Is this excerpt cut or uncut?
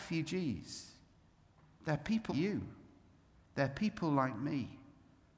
cut